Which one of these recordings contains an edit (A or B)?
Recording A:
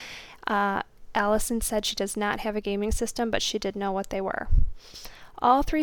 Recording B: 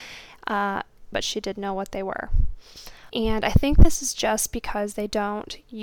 B